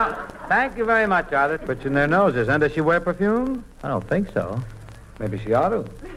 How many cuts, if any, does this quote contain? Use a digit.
1